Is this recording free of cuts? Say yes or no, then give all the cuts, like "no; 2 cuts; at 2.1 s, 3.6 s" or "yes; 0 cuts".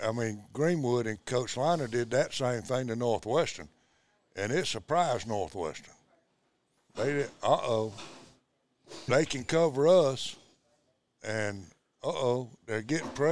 no; 1 cut; at 9.1 s